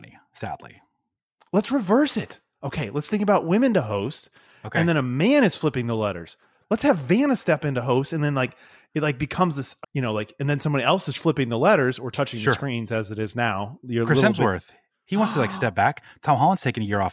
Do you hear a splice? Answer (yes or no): yes